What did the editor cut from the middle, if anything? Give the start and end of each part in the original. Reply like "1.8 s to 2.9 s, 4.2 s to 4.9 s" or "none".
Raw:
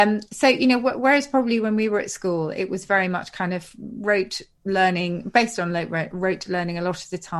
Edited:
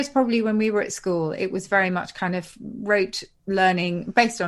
none